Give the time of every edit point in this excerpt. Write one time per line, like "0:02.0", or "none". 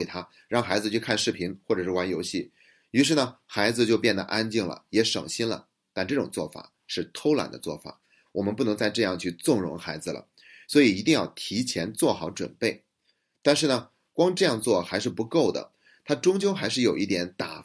none